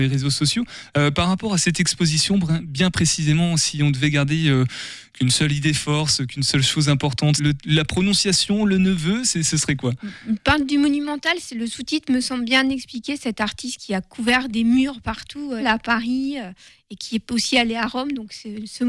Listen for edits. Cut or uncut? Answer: cut